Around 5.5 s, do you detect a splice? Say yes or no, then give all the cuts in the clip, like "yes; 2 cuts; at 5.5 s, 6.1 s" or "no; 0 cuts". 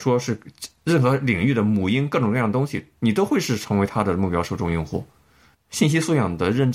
yes; 1 cut; at 5.5 s